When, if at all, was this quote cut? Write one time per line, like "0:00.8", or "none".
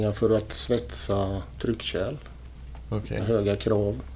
0:03.2